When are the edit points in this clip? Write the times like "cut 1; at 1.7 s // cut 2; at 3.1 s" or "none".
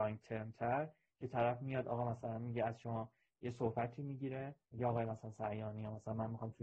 cut 1; at 4.6 s